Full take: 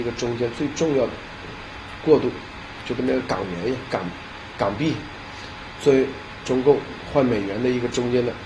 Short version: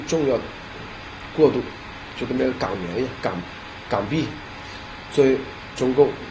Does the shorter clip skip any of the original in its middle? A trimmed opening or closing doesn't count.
no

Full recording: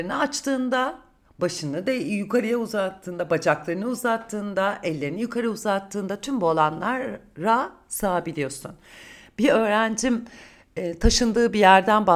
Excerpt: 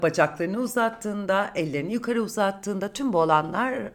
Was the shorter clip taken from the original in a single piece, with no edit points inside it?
yes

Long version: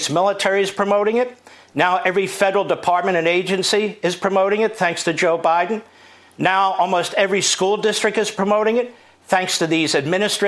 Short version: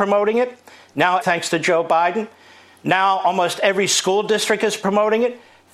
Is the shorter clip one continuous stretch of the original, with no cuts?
no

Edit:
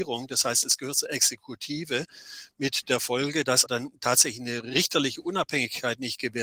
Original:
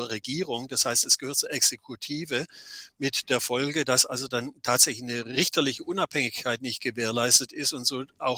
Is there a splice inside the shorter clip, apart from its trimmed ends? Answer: yes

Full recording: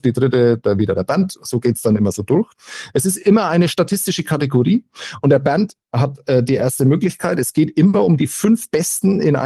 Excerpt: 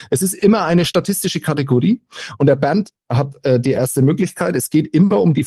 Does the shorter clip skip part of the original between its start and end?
no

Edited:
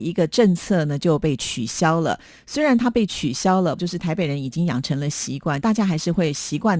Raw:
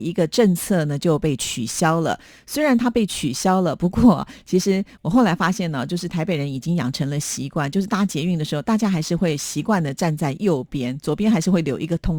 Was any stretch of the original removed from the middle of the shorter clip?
yes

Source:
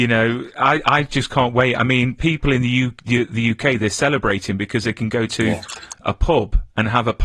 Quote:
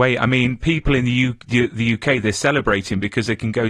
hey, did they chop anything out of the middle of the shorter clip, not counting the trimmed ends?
no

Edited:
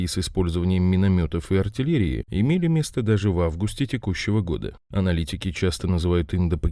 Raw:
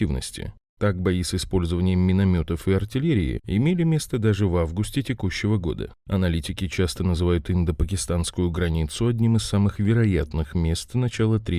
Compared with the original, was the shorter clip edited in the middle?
no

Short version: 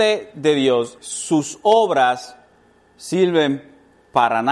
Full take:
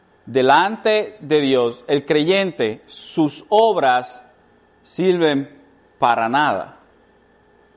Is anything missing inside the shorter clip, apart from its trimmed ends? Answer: yes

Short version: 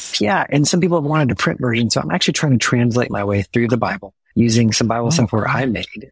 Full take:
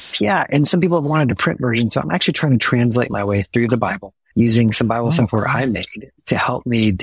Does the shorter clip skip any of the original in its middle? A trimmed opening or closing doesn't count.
no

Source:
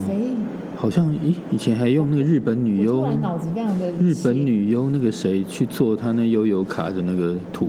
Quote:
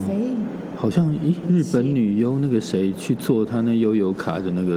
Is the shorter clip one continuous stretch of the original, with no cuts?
no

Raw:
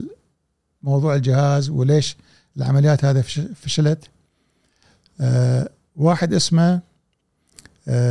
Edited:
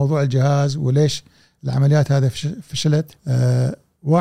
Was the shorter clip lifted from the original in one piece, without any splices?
no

